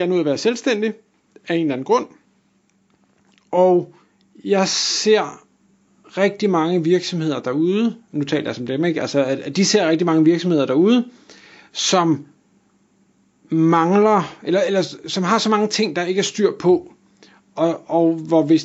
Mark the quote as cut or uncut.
uncut